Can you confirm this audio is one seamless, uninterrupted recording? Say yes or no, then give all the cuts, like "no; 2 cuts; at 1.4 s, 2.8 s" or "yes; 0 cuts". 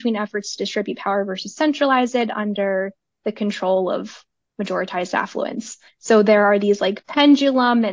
yes; 0 cuts